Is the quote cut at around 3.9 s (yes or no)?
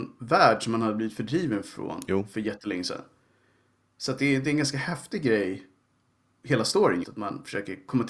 no